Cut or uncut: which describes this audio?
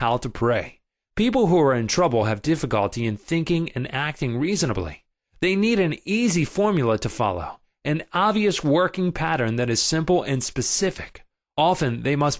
uncut